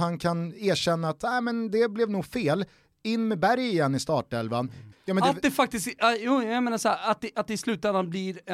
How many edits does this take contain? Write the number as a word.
one